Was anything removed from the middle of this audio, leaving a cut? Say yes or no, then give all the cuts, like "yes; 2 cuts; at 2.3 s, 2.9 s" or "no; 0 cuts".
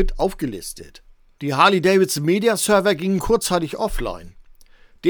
no; 0 cuts